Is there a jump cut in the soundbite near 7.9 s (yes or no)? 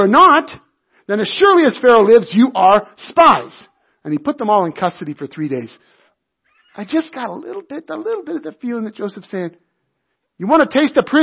yes